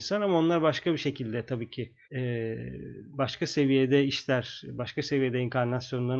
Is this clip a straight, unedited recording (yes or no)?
no